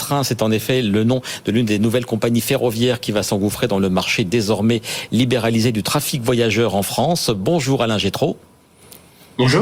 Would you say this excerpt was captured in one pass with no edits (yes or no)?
yes